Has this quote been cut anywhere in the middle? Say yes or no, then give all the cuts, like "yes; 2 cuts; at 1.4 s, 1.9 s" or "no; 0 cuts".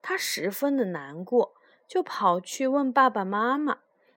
no; 0 cuts